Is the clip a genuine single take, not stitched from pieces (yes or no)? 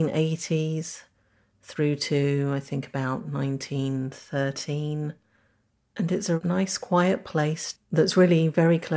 yes